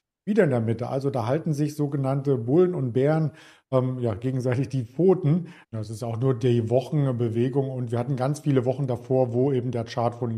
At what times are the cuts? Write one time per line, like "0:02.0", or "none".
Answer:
0:05.6